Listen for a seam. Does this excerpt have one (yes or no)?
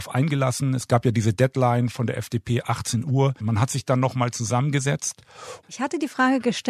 yes